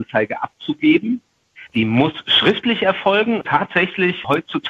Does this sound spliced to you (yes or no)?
yes